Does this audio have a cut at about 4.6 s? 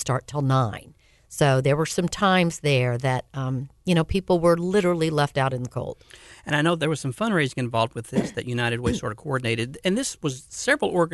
no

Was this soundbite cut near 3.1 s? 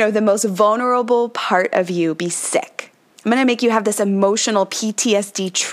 yes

